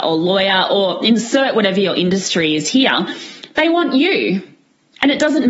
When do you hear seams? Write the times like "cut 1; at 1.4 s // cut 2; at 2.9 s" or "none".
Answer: none